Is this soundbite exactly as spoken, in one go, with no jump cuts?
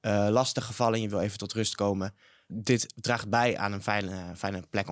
no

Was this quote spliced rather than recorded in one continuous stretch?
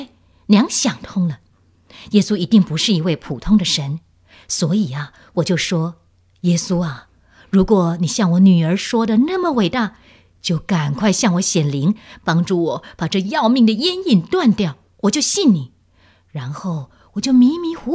no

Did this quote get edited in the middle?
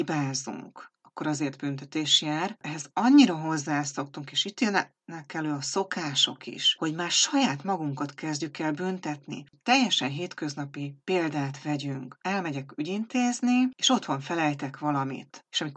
no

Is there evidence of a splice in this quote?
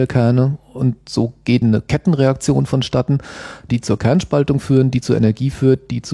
yes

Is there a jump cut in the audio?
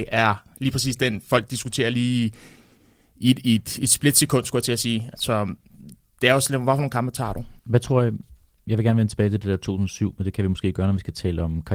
yes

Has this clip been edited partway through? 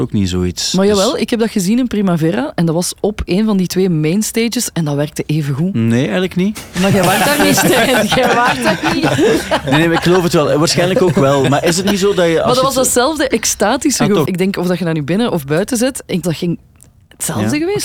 yes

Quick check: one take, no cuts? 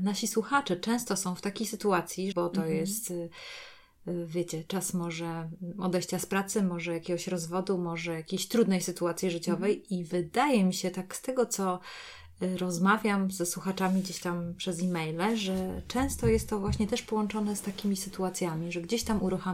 no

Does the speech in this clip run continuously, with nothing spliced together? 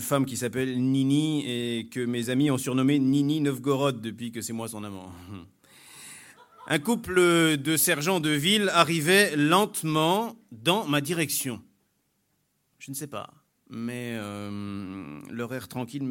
yes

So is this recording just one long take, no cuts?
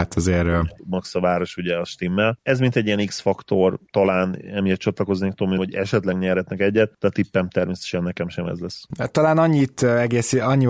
no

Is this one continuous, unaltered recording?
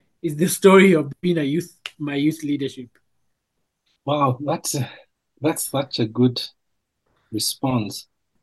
yes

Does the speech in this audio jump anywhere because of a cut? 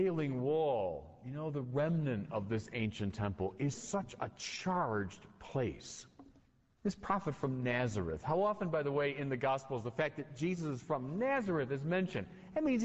yes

